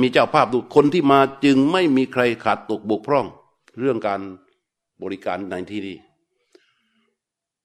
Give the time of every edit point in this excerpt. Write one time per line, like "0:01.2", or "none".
none